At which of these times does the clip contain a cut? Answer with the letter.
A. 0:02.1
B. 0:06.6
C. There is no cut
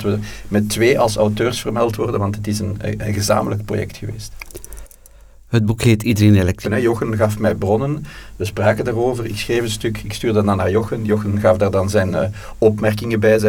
B